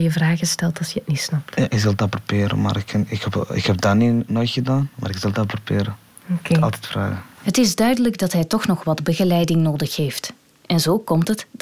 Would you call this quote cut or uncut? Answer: uncut